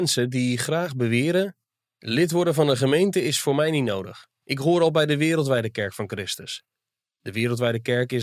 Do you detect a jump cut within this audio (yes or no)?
no